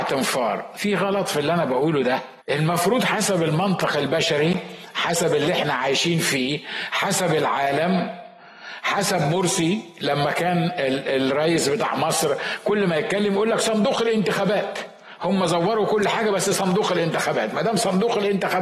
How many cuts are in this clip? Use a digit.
1